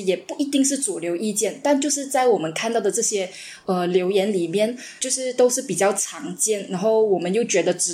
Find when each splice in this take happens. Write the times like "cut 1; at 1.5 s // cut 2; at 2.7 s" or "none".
none